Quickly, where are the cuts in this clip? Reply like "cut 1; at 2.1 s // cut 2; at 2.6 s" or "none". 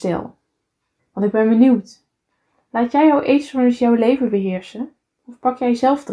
cut 1; at 1.0 s